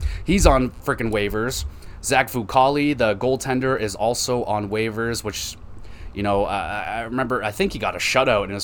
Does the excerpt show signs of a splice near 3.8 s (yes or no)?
no